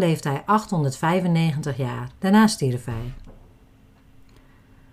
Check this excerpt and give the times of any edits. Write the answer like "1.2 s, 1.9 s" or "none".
2.2 s